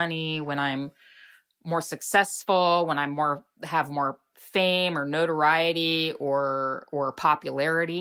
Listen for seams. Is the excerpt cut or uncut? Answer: uncut